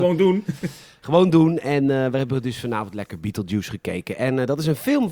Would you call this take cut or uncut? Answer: uncut